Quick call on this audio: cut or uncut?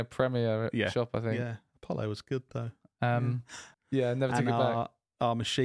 cut